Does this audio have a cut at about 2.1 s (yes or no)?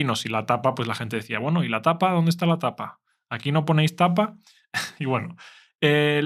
no